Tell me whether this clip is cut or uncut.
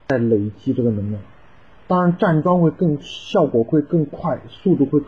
uncut